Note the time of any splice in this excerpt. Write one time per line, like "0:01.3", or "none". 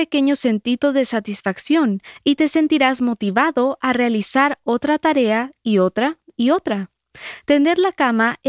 none

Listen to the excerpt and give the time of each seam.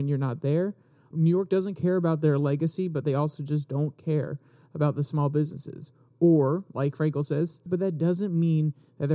0:01.1
0:07.7

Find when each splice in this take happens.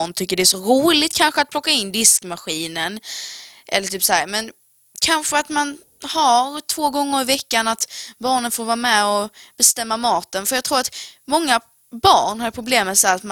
none

